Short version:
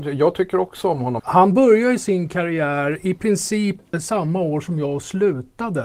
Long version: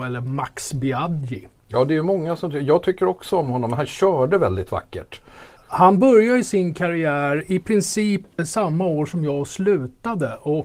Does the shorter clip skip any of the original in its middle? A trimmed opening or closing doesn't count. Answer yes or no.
yes